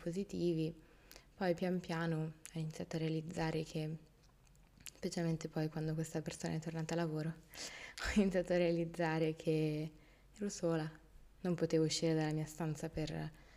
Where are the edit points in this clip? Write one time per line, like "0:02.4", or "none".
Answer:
0:11.4